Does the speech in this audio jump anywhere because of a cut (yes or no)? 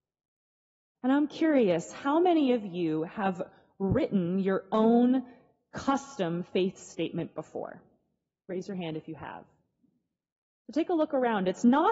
no